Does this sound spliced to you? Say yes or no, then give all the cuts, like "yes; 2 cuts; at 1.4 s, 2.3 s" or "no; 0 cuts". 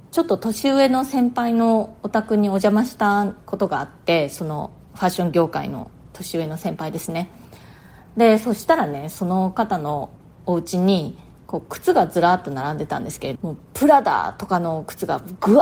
yes; 1 cut; at 13.3 s